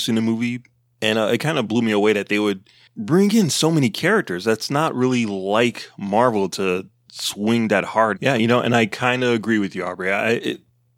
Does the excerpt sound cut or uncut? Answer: cut